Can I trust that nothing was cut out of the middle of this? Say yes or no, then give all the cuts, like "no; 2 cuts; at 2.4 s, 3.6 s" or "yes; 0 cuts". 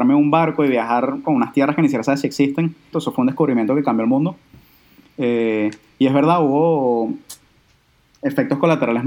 no; 2 cuts; at 1.2 s, 2.9 s